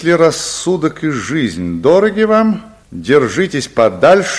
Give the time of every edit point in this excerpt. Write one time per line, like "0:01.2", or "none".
0:02.8